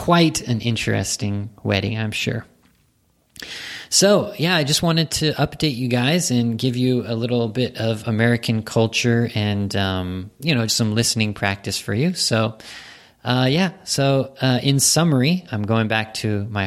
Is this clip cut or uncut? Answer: cut